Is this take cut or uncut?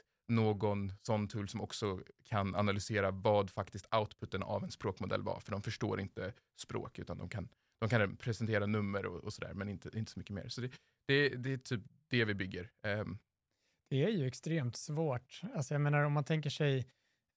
uncut